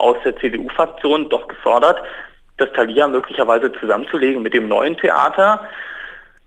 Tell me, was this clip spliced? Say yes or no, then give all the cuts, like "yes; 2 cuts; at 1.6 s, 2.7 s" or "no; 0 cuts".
no; 0 cuts